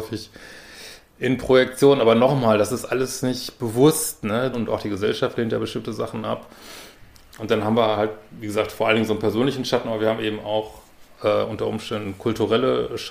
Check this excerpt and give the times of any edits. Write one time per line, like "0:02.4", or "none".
0:04.5
0:07.3